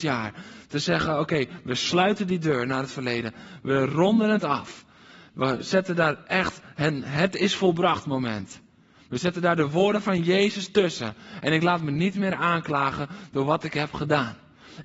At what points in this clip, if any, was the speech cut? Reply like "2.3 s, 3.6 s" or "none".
none